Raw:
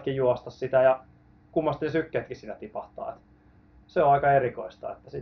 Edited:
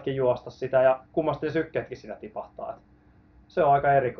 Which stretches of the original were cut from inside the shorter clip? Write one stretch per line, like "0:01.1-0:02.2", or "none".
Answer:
0:01.1-0:01.4